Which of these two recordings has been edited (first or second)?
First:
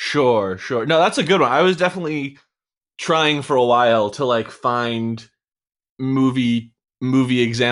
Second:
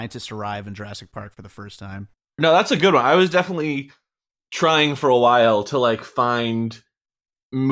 second